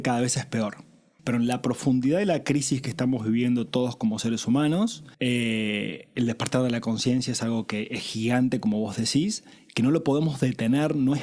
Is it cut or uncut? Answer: cut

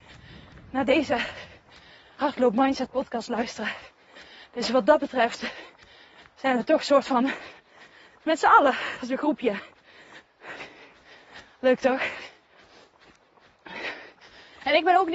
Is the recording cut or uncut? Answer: uncut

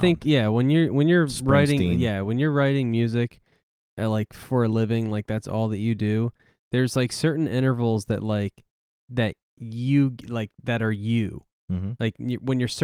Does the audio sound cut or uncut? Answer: uncut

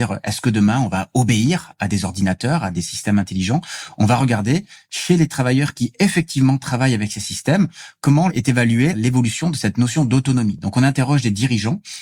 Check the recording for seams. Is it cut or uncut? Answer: uncut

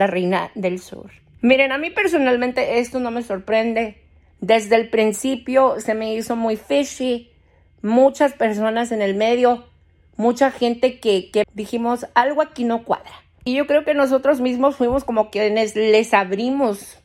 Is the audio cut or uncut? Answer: cut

